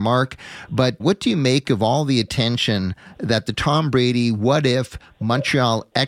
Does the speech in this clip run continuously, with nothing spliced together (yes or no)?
no